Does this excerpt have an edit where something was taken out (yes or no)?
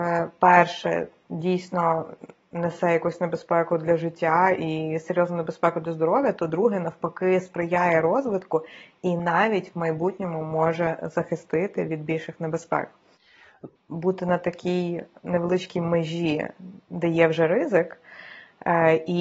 yes